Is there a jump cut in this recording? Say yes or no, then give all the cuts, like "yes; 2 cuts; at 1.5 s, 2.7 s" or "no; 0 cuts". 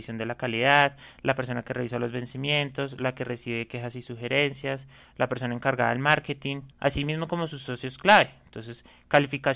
yes; 1 cut; at 6.7 s